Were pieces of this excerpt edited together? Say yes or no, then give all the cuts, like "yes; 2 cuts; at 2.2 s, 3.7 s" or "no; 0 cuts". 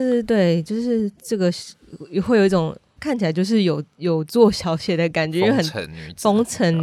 yes; 1 cut; at 3.0 s